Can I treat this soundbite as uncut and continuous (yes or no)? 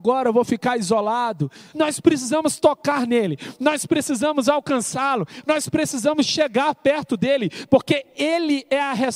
no